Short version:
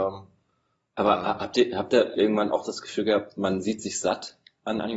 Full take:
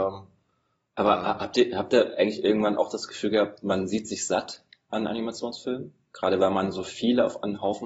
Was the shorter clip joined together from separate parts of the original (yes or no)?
yes